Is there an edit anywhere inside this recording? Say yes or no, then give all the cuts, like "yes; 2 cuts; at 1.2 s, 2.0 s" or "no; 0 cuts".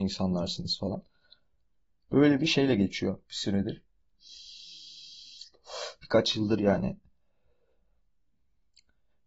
yes; 1 cut; at 3.3 s